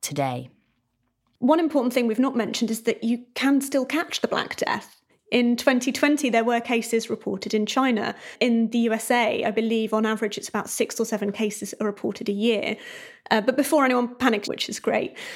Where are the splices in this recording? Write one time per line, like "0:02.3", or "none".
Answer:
0:14.4